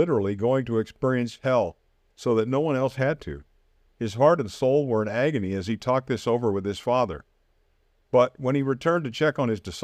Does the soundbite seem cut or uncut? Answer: cut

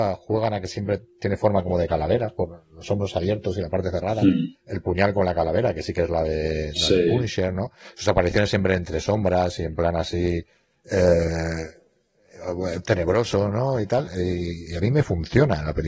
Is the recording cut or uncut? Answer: uncut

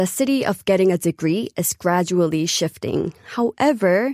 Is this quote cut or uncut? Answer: uncut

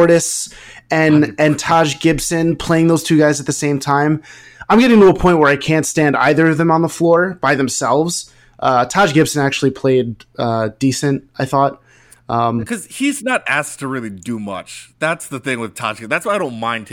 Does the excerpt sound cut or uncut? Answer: uncut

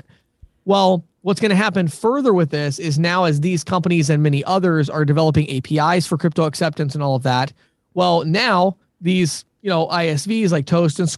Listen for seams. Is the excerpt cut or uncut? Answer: uncut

